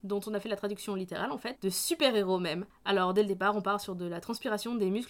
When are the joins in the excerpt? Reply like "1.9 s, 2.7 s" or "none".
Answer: 1.5 s